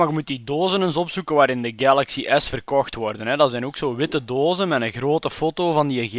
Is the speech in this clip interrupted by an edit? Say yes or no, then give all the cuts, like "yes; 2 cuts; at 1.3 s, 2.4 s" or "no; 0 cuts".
no; 0 cuts